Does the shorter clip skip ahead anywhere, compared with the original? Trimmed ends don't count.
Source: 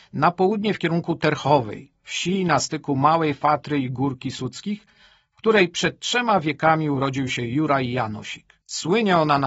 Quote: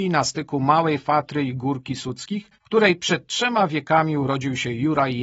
yes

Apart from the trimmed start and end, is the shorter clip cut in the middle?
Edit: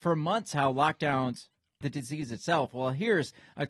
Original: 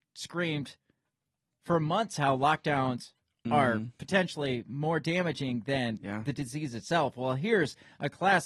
yes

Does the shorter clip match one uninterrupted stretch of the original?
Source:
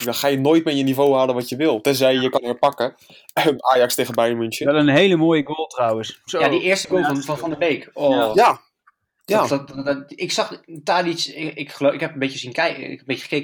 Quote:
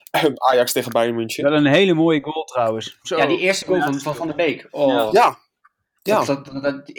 yes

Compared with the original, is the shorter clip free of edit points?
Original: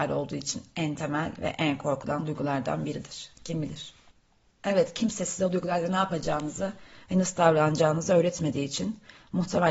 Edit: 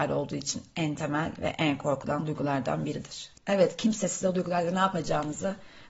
no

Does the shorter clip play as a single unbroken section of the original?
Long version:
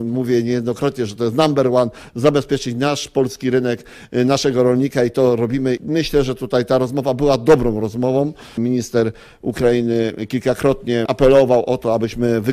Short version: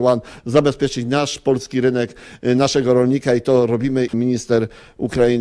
no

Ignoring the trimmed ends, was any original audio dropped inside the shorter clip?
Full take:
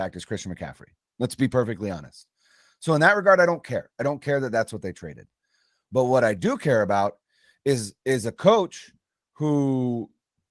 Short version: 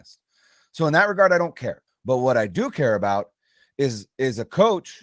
yes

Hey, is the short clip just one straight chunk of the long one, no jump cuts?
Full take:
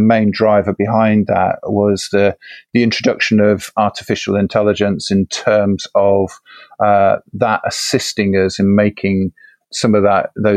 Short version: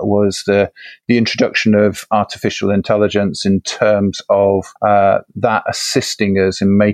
no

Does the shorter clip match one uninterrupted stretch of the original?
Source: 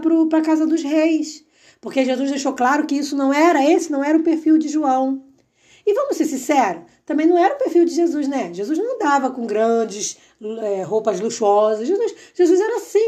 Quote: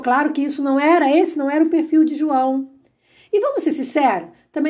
yes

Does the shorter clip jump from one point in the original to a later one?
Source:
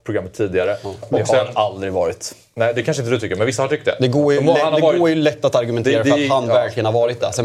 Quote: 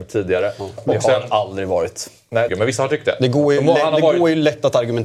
yes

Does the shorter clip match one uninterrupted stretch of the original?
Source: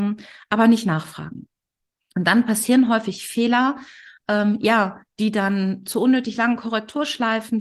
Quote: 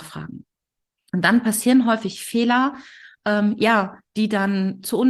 yes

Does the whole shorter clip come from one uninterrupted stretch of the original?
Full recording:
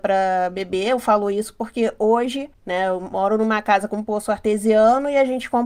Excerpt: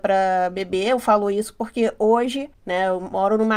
yes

